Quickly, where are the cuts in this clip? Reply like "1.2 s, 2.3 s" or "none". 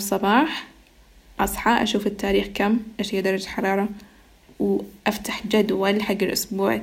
none